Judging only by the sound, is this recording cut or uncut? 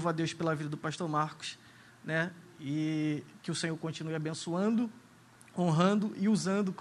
uncut